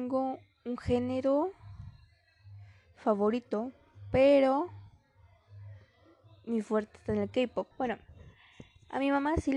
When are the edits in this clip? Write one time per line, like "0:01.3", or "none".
0:07.7